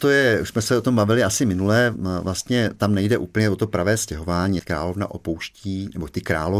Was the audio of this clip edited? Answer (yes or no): yes